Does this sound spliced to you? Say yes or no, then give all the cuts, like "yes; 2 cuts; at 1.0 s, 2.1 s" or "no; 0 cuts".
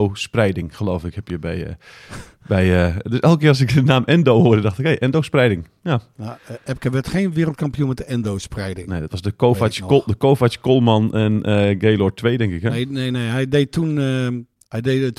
no; 0 cuts